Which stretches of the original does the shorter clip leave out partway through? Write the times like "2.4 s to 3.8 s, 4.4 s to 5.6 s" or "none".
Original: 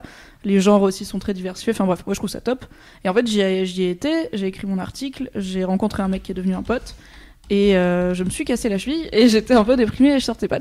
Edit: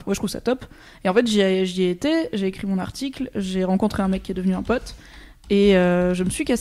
none